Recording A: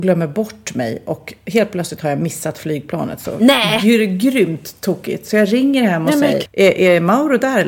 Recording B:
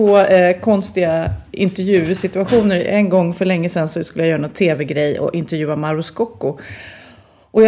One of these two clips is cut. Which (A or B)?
A